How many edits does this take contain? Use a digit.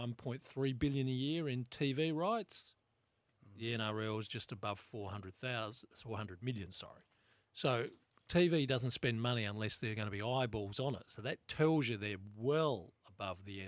0